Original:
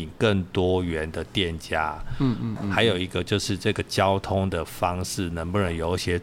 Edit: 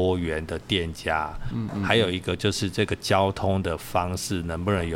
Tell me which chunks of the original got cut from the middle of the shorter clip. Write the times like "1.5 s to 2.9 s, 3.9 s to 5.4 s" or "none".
2.2 s to 2.4 s